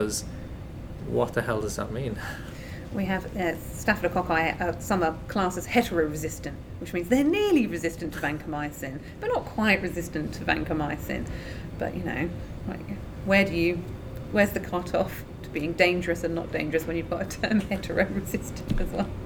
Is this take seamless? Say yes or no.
yes